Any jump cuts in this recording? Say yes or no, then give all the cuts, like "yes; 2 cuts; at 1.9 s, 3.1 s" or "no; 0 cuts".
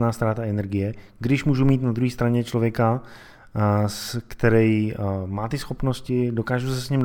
no; 0 cuts